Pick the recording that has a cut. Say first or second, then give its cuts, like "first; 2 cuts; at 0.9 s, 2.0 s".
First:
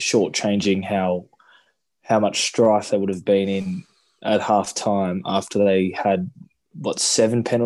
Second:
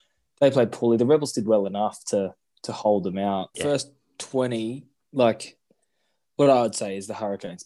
second; 1 cut; at 3.5 s